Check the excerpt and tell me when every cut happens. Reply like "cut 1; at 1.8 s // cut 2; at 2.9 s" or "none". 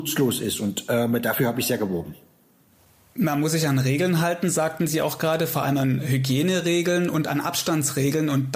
none